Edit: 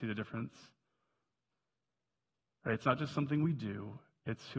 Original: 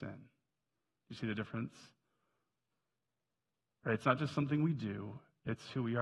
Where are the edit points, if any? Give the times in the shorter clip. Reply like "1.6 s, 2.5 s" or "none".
none